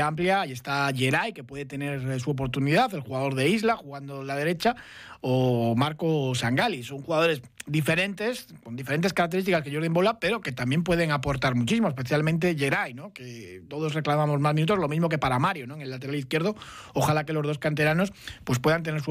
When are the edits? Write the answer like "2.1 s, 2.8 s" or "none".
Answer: none